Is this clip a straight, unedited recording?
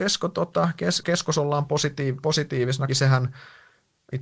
no; 2 cuts; at 1.0 s, 2.9 s

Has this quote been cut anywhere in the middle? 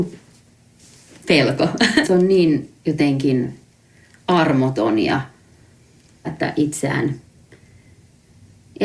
yes; 2 cuts; at 2.0 s, 6.2 s

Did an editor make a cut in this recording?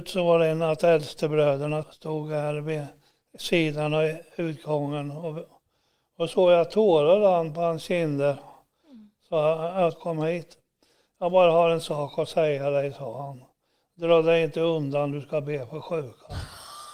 yes; 2 cuts; at 1.8 s, 9.9 s

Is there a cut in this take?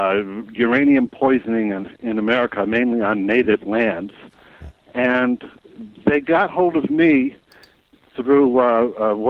no; 0 cuts

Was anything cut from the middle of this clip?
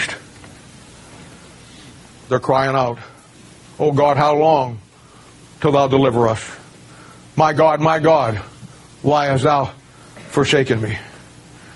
yes; 1 cut; at 2.3 s

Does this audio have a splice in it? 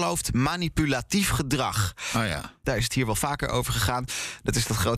yes; 1 cut; at 2.6 s

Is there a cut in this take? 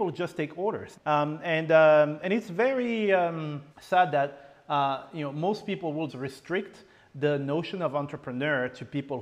yes; 3 cuts; at 0.9 s, 3.7 s, 6.1 s

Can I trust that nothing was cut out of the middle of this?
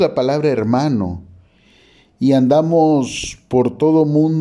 yes; 0 cuts

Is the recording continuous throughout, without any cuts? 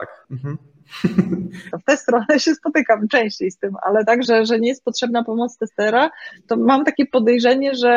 no; 2 cuts; at 1.7 s, 4.2 s

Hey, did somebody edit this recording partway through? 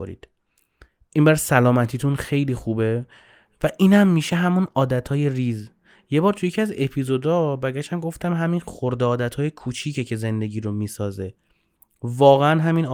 no; 0 cuts

